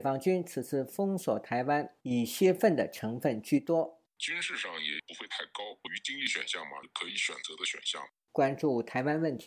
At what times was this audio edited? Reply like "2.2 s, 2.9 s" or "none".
4.2 s, 8.3 s